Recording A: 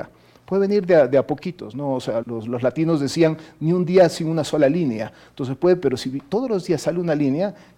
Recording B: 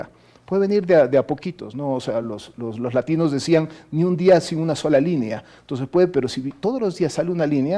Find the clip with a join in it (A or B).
A